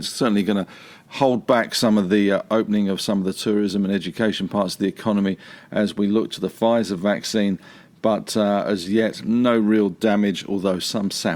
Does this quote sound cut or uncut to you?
uncut